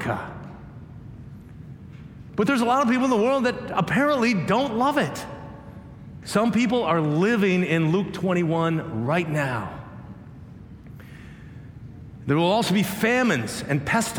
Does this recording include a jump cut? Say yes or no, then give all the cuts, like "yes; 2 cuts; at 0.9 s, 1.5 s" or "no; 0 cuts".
yes; 2 cuts; at 2.3 s, 6.2 s